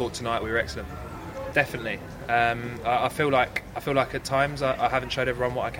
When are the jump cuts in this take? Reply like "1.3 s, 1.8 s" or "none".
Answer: 1.5 s